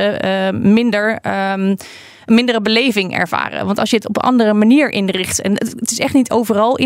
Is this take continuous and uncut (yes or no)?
yes